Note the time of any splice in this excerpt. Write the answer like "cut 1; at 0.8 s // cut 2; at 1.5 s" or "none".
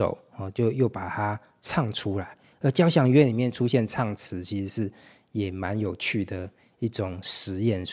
none